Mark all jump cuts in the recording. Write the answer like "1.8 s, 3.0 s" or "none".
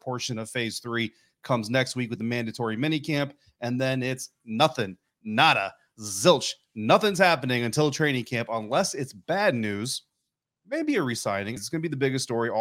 11.6 s